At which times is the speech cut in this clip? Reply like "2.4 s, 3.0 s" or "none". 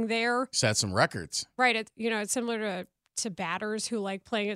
1.9 s